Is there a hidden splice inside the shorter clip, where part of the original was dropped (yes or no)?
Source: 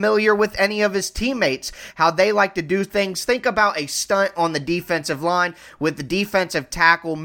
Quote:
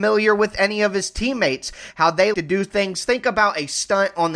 yes